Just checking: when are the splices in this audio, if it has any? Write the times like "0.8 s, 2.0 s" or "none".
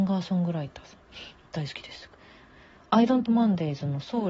1.5 s, 3.3 s